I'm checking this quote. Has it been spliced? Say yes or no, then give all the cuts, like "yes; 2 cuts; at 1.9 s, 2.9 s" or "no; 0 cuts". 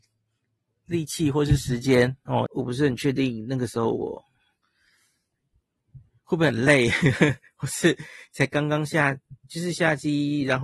yes; 1 cut; at 2.5 s